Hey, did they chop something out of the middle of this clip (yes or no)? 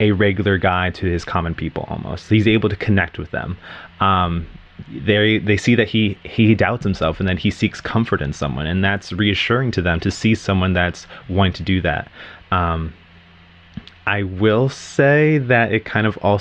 no